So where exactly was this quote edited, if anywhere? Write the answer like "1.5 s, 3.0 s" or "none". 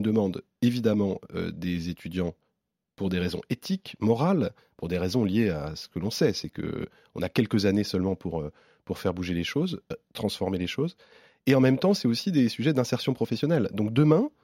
none